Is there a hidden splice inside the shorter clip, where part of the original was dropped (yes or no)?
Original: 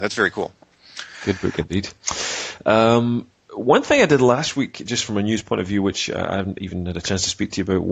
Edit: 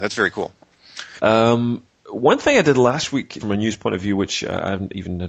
yes